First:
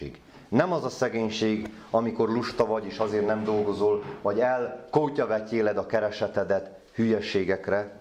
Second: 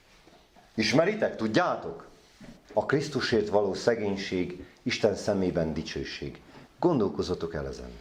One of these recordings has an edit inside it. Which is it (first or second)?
second